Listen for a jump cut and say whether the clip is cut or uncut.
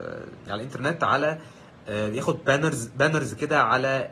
uncut